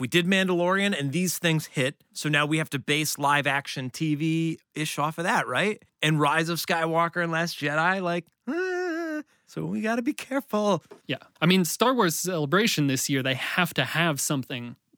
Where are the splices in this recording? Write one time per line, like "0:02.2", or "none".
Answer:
0:11.0